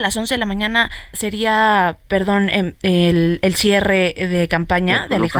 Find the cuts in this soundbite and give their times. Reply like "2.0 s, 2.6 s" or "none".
1.1 s